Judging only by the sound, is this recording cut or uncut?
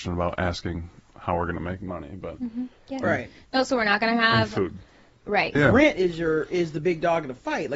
cut